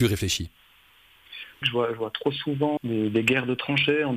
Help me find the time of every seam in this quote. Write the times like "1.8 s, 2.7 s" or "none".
1.6 s, 2.8 s

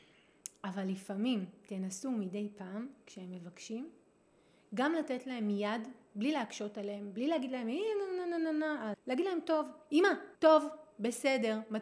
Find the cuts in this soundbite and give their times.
8.9 s, 10.3 s

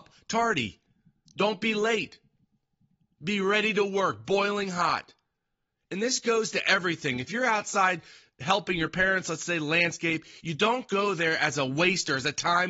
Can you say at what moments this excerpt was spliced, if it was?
none

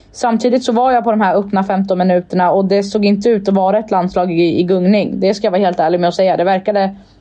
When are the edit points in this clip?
none

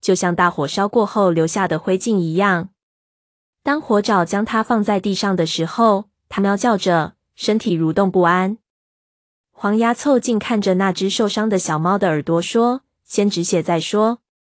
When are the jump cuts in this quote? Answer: 6.4 s, 9.3 s

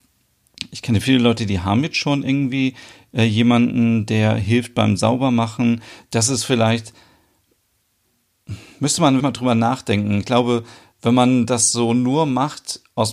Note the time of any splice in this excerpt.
9.2 s

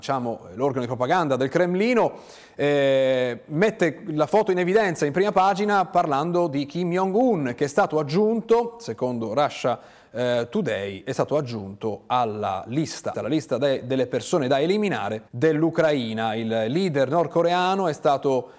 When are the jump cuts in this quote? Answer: 13.1 s, 15.3 s

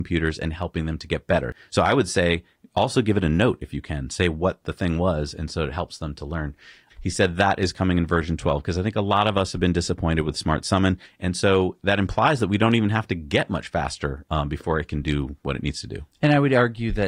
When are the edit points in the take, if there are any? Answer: 6.9 s, 11.1 s, 14.3 s

